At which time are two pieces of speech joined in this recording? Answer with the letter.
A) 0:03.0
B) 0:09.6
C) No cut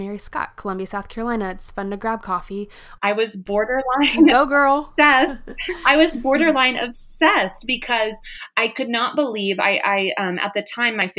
A